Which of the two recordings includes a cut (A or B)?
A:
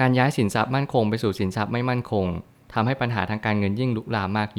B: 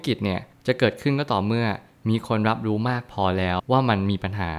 B